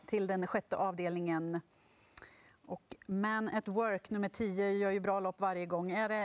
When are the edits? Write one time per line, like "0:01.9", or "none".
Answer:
none